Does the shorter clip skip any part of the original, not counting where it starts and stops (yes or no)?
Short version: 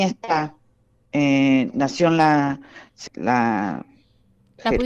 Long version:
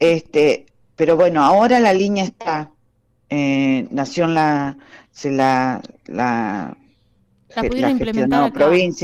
yes